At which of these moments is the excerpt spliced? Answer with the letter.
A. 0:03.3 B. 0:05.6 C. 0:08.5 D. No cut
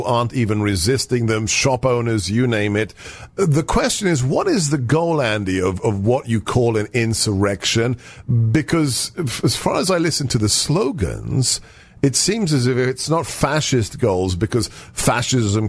D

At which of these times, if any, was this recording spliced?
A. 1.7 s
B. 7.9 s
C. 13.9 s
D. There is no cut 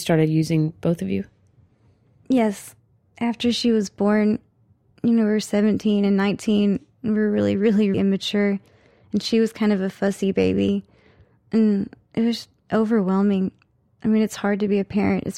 B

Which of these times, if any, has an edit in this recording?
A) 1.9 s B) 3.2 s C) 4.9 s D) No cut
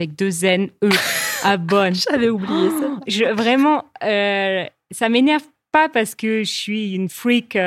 D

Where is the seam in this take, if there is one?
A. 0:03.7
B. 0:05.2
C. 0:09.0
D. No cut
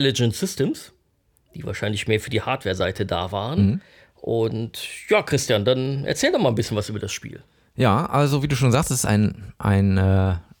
D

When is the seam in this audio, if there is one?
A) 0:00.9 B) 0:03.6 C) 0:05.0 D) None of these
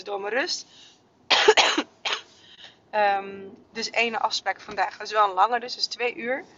B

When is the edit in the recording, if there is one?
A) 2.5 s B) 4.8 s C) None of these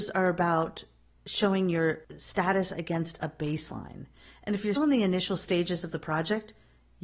B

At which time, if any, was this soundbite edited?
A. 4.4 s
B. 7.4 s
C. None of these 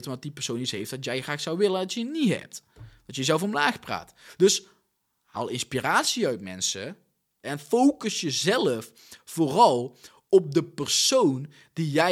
B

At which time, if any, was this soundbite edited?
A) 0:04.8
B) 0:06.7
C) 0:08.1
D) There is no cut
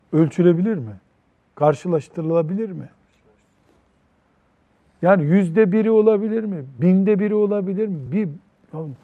D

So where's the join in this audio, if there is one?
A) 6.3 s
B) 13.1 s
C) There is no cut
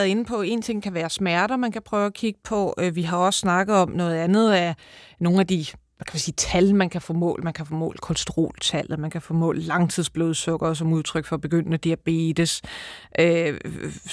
C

